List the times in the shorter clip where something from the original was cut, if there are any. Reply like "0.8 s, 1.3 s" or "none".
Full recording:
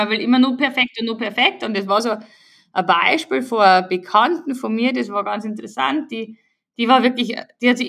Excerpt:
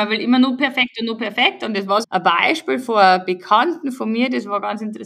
2.0 s